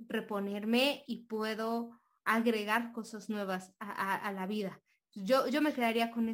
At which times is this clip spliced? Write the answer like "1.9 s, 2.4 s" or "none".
none